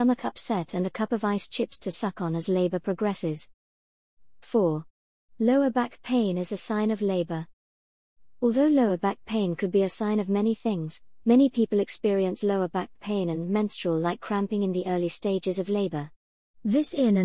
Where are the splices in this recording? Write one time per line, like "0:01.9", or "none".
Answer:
0:11.2